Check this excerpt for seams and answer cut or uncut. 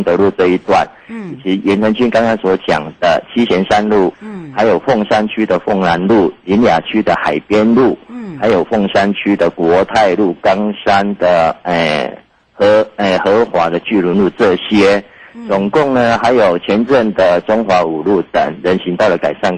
cut